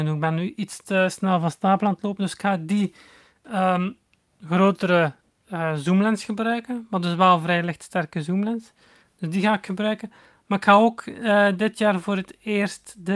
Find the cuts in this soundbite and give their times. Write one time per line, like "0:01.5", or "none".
none